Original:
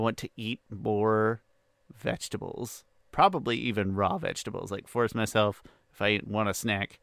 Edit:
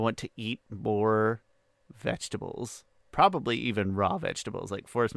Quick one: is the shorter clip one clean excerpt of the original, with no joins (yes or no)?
yes